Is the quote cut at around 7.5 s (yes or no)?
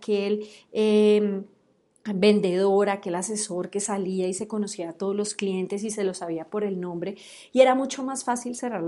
no